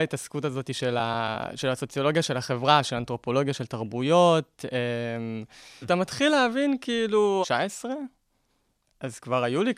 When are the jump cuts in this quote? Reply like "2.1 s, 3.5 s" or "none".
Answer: 5.8 s, 7.4 s